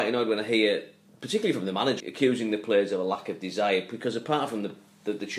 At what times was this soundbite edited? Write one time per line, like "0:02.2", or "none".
0:02.0